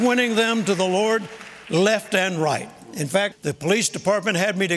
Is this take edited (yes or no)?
yes